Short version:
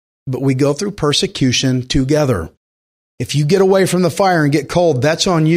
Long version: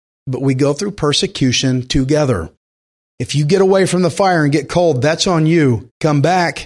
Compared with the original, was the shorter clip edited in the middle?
no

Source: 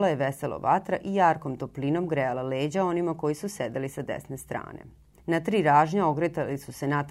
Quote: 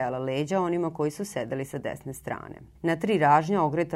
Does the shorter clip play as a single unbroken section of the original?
no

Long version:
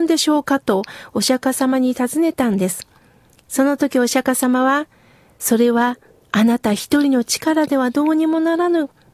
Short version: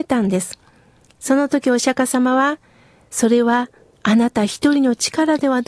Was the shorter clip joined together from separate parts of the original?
no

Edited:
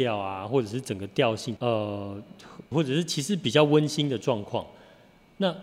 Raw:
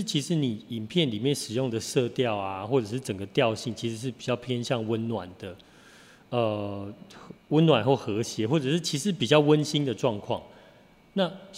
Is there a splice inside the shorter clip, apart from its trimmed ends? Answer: yes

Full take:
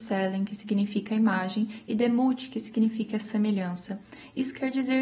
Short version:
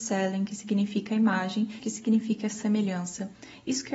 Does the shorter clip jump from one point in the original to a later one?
yes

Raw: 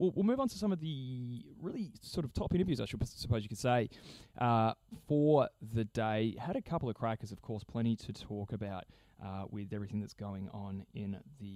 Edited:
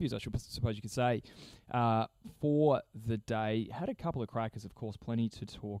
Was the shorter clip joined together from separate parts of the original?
no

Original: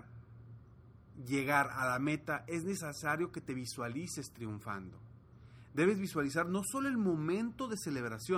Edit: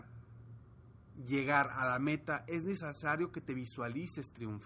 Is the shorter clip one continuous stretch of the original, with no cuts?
yes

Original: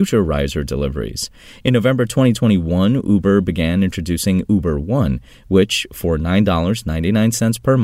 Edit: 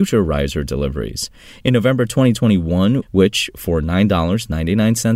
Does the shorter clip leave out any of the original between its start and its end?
yes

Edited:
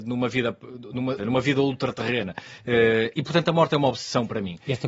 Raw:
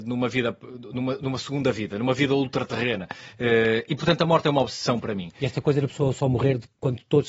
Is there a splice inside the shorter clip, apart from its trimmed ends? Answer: yes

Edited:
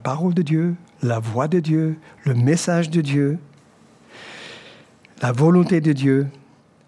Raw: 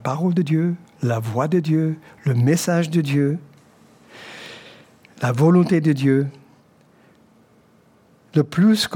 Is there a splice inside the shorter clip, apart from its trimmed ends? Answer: no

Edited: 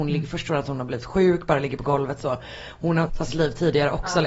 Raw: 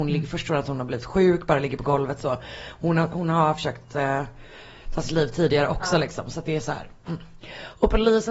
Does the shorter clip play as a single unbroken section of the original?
no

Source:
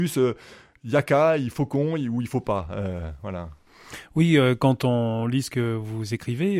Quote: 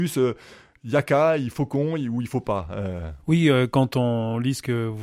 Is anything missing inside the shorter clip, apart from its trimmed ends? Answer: yes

